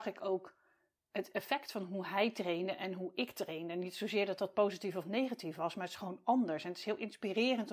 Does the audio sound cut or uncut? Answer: uncut